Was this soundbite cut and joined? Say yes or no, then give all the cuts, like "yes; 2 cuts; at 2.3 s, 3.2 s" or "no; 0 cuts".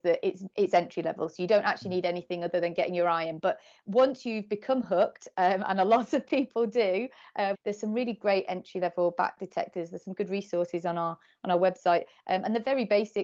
yes; 1 cut; at 7.5 s